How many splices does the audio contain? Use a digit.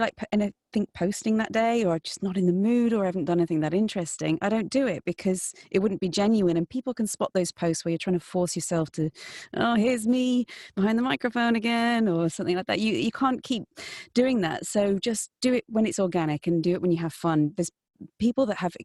0